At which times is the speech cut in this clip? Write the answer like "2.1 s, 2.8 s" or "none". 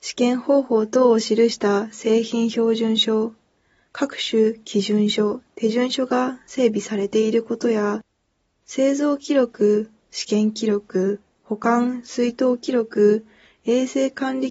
none